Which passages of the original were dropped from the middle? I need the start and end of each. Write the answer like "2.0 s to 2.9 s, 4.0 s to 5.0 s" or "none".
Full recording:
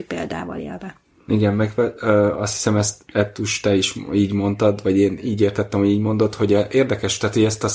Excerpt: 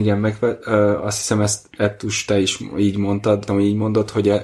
4.8 s to 5.7 s